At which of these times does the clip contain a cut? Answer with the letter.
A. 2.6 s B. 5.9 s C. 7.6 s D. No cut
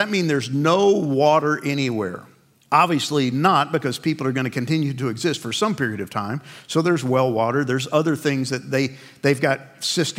D